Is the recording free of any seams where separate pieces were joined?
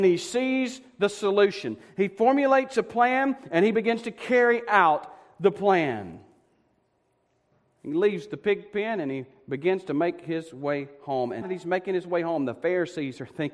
no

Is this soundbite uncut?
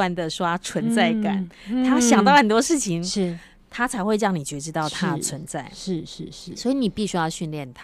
yes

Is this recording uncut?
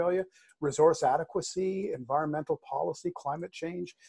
yes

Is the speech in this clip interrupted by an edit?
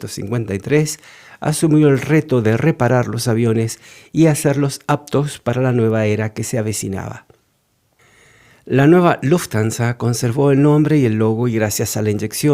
no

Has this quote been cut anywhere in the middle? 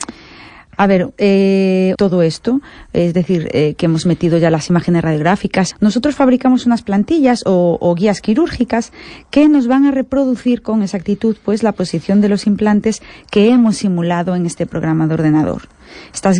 yes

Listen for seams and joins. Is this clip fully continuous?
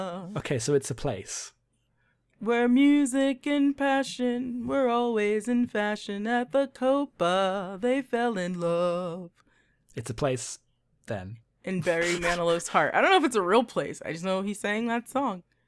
yes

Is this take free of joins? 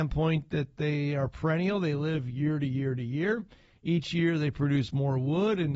yes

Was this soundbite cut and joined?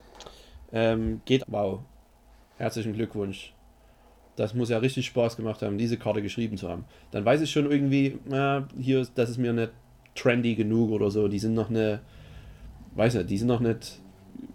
yes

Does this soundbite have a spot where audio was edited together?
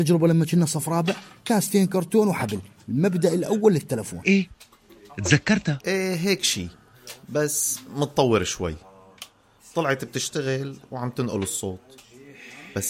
yes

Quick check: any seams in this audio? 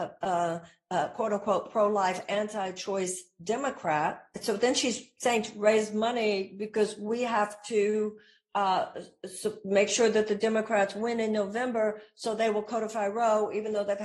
no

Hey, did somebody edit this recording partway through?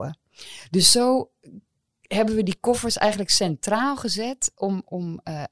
no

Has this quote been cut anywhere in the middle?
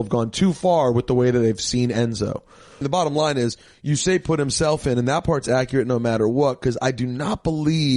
yes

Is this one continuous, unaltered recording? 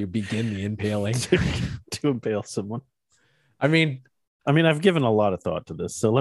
yes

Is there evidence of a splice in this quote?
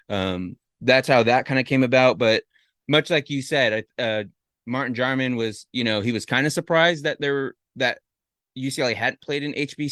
no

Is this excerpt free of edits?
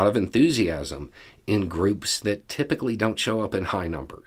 yes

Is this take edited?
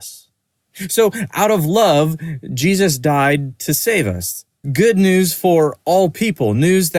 yes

